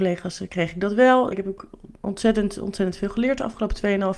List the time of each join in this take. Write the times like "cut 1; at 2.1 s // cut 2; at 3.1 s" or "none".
cut 1; at 1.3 s